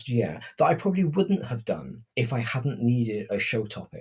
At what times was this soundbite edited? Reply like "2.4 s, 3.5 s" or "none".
2.1 s

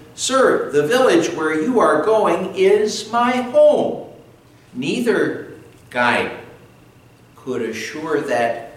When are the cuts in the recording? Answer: 4.7 s

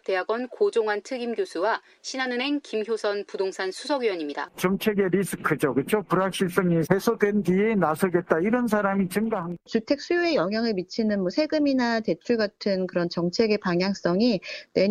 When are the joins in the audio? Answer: none

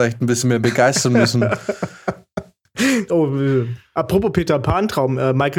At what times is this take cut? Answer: 3.1 s

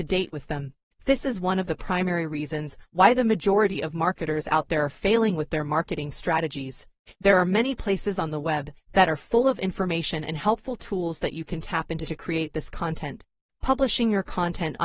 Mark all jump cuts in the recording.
7.1 s

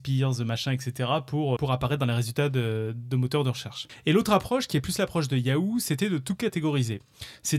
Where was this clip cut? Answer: 1.6 s

